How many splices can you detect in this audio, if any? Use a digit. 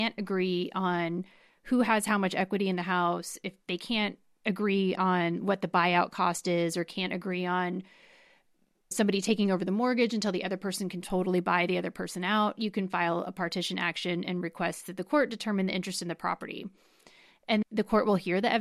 1